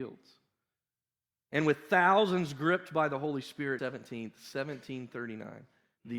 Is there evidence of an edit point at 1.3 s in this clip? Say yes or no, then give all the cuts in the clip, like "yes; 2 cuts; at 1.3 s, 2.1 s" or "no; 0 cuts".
yes; 2 cuts; at 1.3 s, 3.8 s